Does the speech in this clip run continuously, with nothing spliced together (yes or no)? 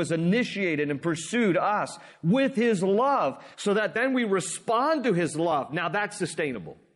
yes